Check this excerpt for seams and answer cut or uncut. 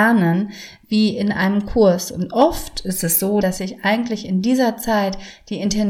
cut